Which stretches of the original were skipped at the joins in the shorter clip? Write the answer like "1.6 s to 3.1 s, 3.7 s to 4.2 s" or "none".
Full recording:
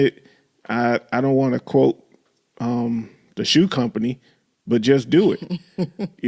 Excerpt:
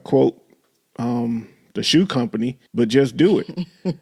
4.3 s to 4.6 s